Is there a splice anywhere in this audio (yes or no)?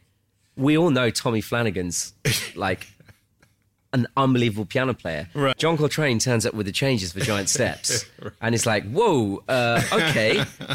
yes